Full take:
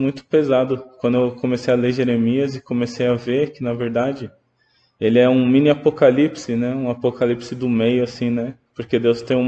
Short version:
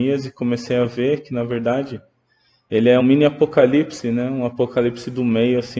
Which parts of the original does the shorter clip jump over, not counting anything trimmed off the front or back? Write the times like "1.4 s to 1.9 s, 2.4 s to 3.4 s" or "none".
5.3 s to 5.4 s